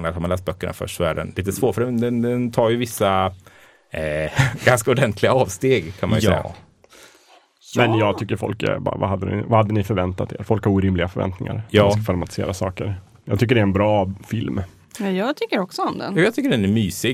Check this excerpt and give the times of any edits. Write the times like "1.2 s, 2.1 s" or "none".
none